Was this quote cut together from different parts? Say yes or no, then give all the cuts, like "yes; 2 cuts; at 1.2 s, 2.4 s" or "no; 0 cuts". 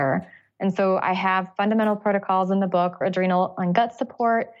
yes; 1 cut; at 3.0 s